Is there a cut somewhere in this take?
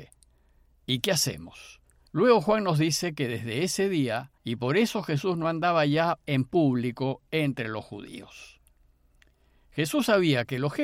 yes; 2 cuts; at 2.1 s, 4.4 s

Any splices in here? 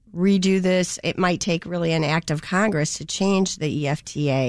no; 0 cuts

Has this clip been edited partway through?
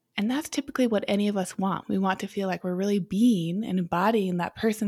yes; 1 cut; at 1.8 s

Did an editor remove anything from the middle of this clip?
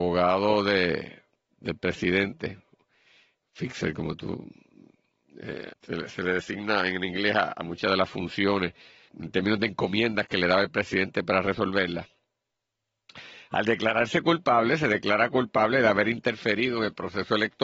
yes; 2 cuts; at 5.7 s, 9.1 s

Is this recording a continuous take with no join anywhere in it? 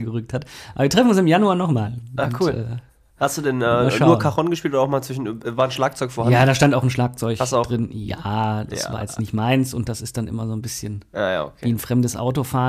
yes; 0 cuts

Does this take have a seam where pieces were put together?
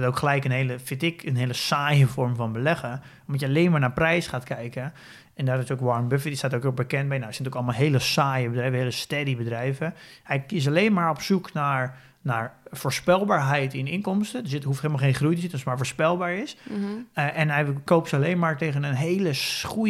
yes; 1 cut; at 7.3 s

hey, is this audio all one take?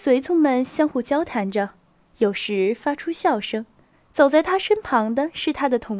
no; 1 cut; at 3.9 s

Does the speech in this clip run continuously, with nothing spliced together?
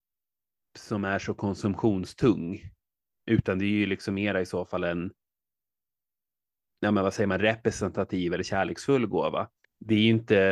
no; 1 cut; at 9.6 s

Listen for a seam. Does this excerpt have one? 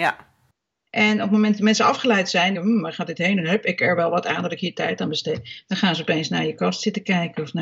yes; 1 cut; at 2.5 s

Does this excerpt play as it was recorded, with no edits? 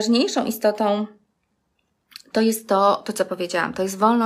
yes; 0 cuts

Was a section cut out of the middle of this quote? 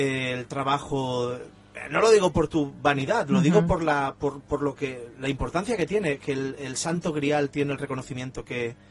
no; 0 cuts

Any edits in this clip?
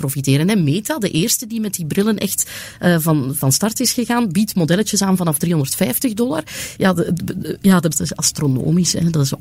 yes; 2 cuts; at 6.8 s, 7.9 s

